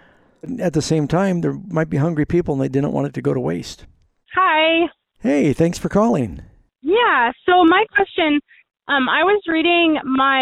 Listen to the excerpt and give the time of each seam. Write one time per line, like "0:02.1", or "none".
0:04.2